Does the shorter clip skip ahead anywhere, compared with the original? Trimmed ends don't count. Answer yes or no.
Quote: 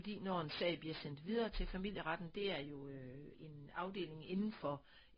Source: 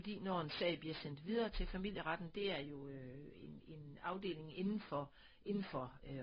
yes